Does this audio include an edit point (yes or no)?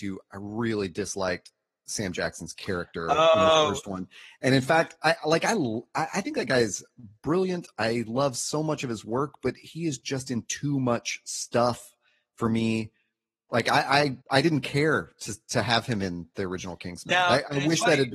yes